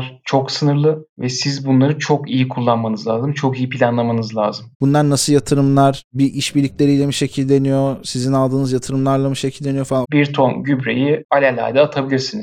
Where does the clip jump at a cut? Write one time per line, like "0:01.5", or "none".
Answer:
0:04.7
0:10.0